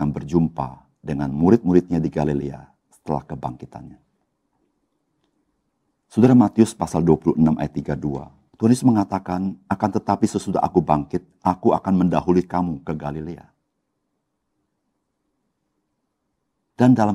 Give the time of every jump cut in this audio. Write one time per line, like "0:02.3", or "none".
0:08.5